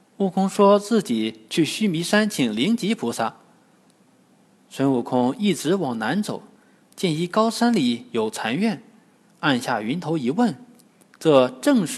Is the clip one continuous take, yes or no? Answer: yes